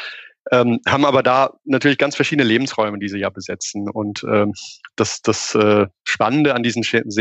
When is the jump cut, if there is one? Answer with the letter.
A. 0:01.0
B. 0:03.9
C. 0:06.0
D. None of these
D